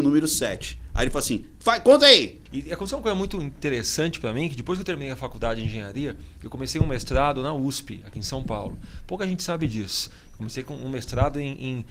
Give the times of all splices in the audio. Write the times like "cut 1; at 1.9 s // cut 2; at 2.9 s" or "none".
cut 1; at 2.5 s